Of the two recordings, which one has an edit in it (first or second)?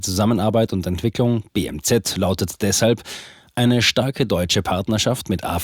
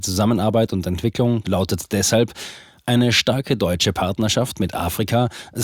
second